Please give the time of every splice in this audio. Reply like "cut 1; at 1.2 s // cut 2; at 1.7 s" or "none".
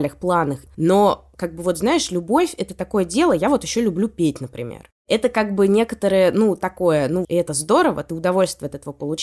cut 1; at 5.0 s // cut 2; at 7.2 s